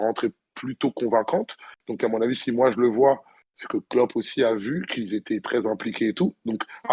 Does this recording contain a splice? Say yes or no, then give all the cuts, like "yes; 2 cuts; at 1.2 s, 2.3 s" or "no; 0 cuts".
no; 0 cuts